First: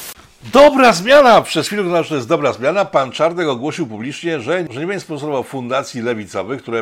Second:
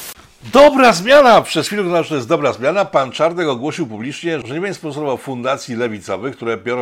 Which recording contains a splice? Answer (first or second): second